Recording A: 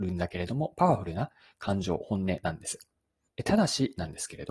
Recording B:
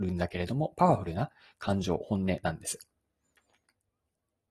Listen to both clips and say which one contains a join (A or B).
A